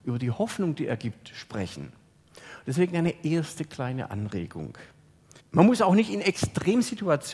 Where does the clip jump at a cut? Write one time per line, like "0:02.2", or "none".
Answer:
0:05.4